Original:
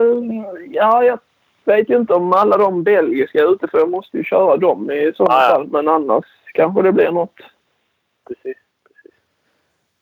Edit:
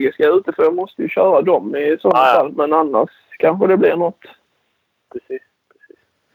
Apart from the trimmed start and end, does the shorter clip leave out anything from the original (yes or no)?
no